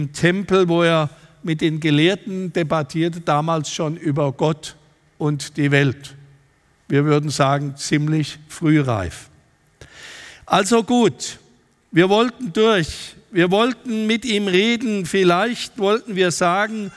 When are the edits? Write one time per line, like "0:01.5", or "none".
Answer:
none